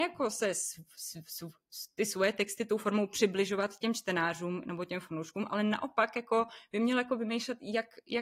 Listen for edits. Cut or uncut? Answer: uncut